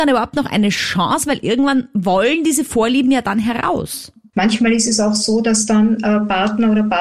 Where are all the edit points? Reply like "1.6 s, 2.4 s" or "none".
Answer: 4.3 s